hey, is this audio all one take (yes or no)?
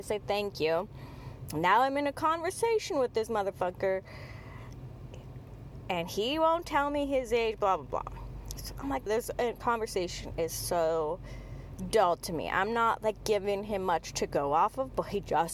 no